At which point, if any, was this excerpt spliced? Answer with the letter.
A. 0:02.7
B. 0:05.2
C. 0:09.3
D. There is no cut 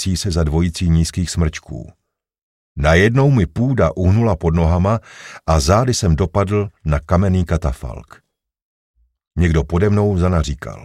C